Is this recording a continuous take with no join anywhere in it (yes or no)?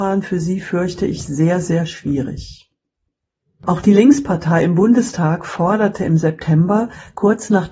yes